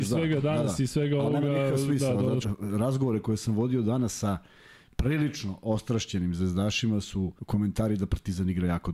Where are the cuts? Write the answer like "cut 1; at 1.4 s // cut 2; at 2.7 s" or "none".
cut 1; at 2.4 s // cut 2; at 7.4 s